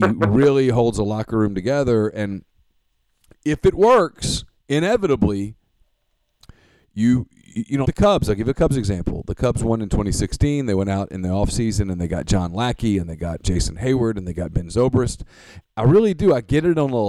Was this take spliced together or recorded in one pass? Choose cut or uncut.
cut